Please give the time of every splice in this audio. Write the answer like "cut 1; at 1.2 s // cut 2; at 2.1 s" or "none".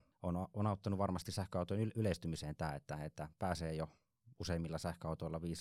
none